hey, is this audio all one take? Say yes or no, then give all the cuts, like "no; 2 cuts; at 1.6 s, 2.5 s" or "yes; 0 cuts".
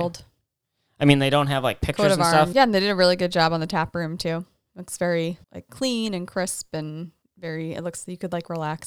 no; 2 cuts; at 2.5 s, 5.4 s